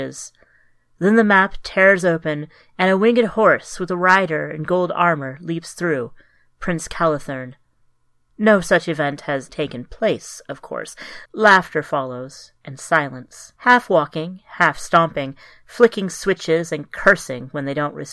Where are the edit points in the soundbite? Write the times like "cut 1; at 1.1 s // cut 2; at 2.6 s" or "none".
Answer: cut 1; at 9.5 s // cut 2; at 11.3 s // cut 3; at 13.6 s